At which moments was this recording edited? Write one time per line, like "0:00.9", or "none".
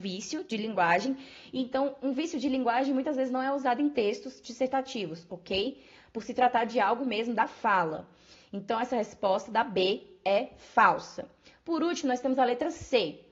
none

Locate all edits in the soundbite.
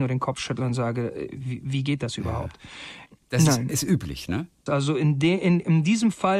0:03.2
0:04.7

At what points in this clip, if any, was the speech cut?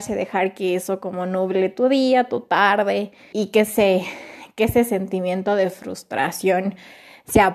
0:03.3

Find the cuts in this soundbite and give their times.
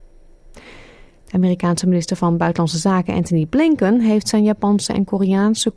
none

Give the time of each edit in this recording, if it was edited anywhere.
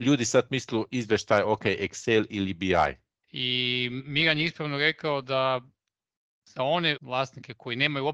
0:03.2
0:07.0

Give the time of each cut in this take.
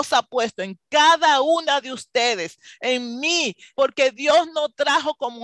0:03.7

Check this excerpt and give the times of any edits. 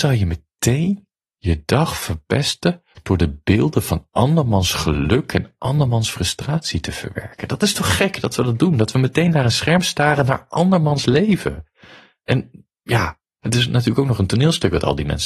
0:12.7

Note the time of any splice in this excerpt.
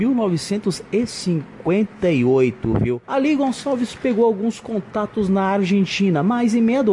0:03.0

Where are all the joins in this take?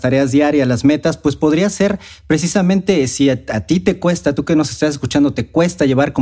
none

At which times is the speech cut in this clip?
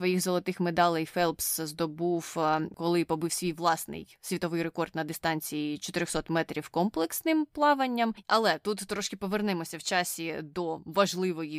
0:08.2

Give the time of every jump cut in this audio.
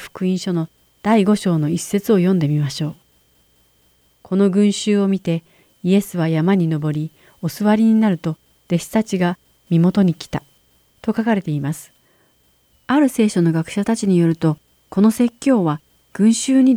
0:12.7

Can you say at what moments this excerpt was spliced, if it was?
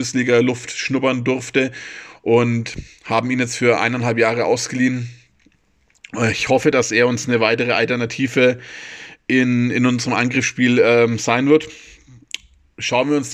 none

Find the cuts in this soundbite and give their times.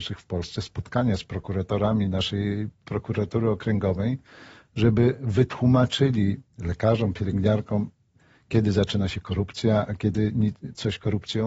0:06.5

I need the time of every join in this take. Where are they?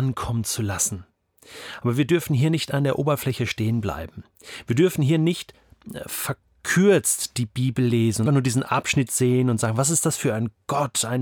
0:08.3

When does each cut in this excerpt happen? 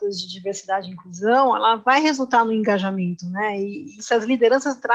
0:04.0

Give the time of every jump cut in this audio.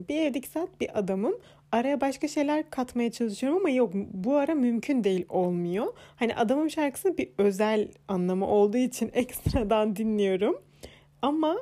none

